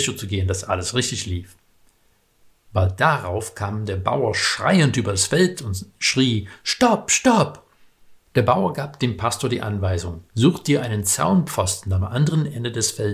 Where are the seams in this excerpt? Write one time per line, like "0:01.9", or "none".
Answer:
0:08.2
0:10.3